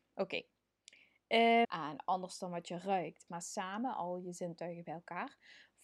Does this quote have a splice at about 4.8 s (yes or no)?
no